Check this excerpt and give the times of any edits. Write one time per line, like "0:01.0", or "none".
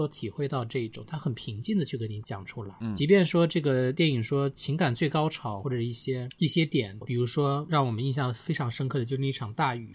0:02.2
0:07.0